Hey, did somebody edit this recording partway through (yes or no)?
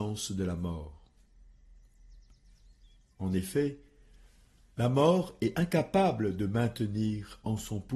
no